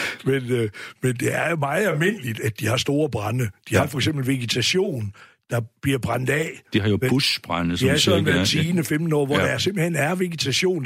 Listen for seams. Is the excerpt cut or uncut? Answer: uncut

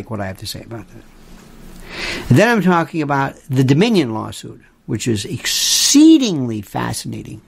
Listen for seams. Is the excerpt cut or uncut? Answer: uncut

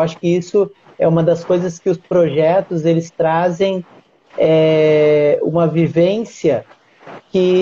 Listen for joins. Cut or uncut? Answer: uncut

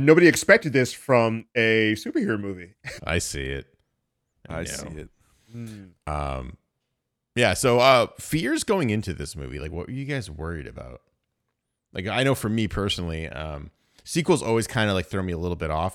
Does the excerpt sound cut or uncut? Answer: cut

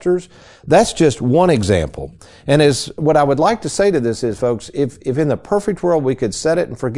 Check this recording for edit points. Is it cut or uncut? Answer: uncut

